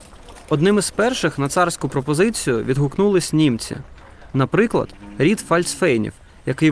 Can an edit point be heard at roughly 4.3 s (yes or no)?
yes